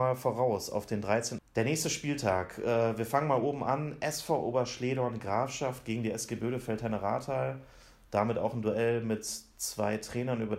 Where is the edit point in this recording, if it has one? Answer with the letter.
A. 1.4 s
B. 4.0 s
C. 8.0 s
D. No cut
A